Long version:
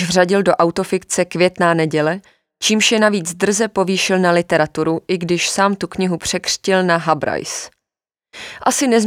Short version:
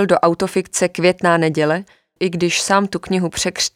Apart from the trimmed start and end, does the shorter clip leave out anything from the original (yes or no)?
yes